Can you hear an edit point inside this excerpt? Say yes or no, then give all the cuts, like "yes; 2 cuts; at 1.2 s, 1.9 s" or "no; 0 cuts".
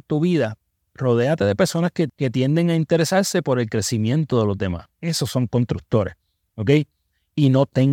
yes; 2 cuts; at 2.1 s, 4.9 s